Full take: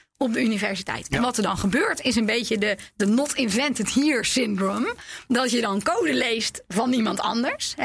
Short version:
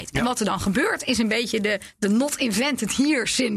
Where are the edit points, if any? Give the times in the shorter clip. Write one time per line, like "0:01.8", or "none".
none